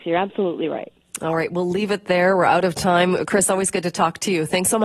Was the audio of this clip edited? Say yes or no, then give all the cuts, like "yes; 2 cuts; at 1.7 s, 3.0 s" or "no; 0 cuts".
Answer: no; 0 cuts